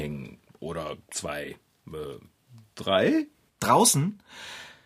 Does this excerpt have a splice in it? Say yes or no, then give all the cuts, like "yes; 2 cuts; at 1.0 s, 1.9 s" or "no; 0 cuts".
yes; 1 cut; at 3.5 s